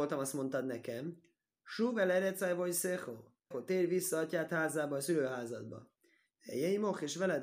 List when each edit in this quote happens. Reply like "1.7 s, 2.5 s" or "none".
3.5 s